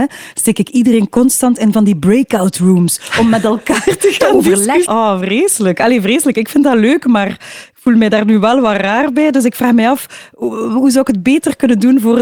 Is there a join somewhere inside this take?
yes; 1 cut; at 4.8 s

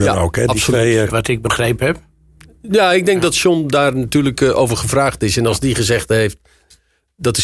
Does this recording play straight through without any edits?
no; 1 cut; at 1.1 s

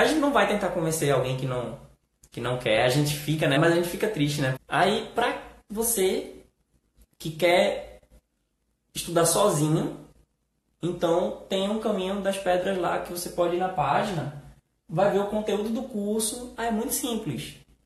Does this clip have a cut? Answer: yes; 2 cuts; at 3.6 s, 4.6 s

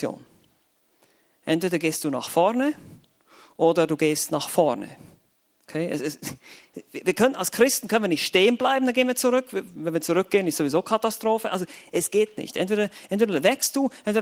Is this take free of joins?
yes; 0 cuts

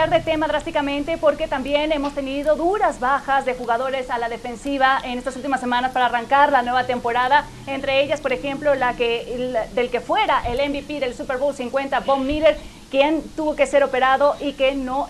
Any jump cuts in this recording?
no; 0 cuts

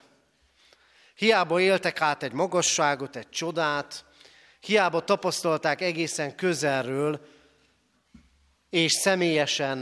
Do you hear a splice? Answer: no; 0 cuts

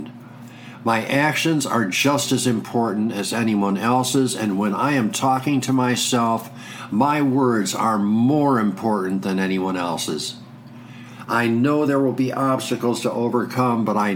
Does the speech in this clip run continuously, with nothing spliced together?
no; 1 cut; at 11.2 s

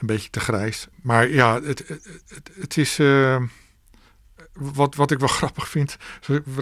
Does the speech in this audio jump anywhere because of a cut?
no; 0 cuts

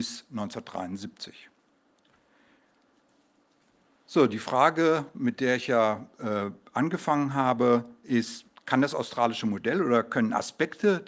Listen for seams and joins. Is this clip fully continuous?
yes; 0 cuts

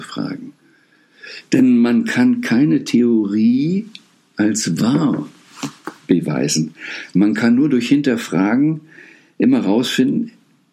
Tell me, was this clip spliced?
no; 0 cuts

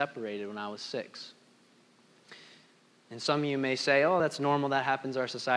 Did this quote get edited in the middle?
no; 0 cuts

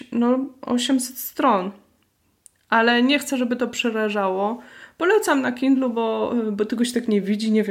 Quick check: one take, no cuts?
yes; 0 cuts

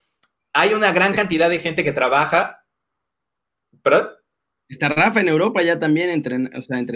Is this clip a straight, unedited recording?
yes; 0 cuts

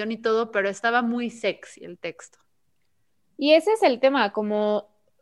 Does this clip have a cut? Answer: no; 0 cuts

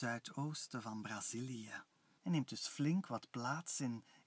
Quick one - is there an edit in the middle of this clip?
yes; 1 cut; at 2.2 s

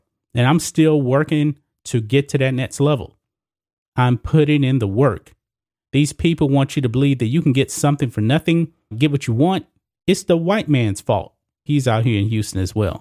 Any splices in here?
yes; 2 cuts; at 8.9 s, 11.7 s

